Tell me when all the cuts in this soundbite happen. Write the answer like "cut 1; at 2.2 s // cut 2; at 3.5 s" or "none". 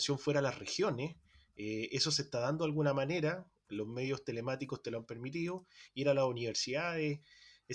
cut 1; at 5.9 s